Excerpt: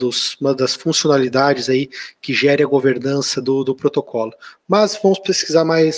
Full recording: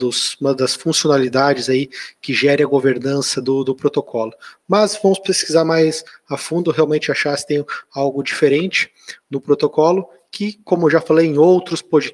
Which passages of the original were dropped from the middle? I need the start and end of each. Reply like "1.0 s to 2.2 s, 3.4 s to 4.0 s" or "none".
none